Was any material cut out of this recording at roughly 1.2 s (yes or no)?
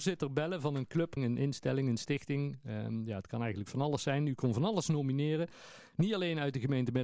yes